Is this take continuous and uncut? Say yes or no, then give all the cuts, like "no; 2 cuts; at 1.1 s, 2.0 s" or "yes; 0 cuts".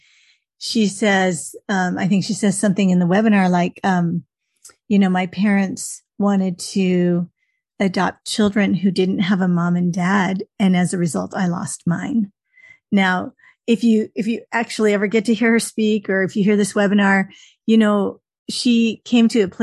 yes; 0 cuts